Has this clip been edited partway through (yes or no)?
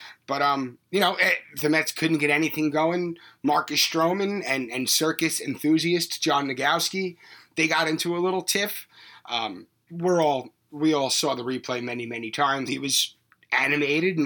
yes